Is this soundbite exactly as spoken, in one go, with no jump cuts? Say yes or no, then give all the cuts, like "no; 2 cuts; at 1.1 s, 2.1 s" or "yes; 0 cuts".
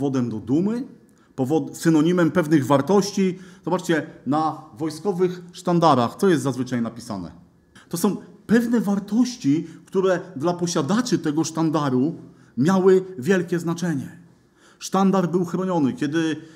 no; 1 cut; at 7.8 s